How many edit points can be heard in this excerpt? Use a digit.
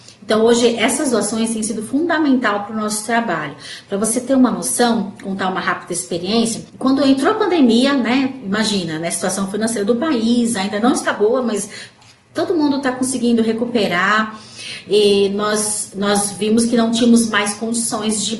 1